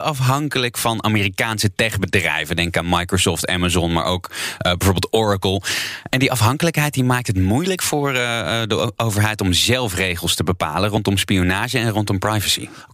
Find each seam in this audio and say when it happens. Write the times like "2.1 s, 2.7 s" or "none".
none